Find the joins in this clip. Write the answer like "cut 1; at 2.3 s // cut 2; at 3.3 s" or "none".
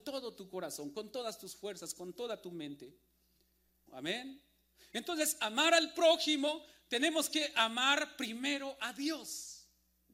cut 1; at 3.9 s